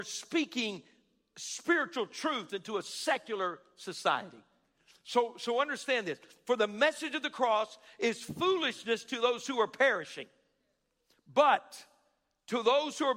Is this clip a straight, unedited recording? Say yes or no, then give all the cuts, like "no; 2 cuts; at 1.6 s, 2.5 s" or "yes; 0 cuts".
yes; 0 cuts